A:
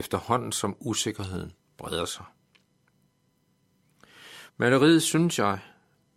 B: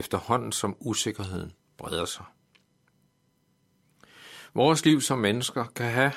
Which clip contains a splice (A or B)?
A